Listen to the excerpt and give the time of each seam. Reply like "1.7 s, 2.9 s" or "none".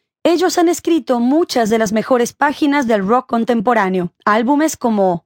4.2 s